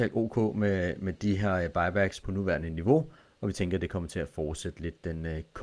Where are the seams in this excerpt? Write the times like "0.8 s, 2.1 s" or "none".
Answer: 2.2 s